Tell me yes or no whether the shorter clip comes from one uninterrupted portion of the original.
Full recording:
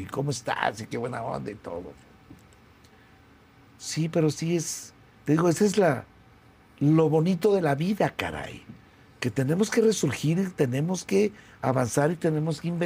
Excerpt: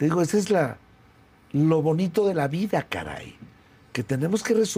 yes